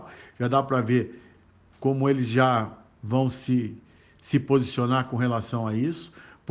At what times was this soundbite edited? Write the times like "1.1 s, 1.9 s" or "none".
none